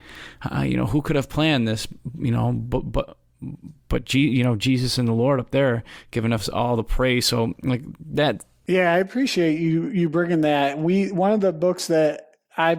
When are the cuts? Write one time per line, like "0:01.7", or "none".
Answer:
0:08.7